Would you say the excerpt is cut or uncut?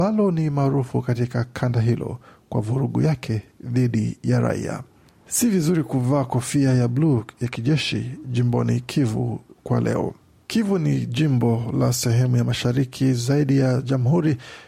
uncut